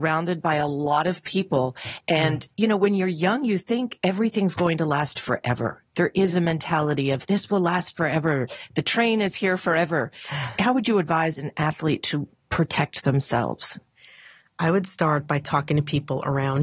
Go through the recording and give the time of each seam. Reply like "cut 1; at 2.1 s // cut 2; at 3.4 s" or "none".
none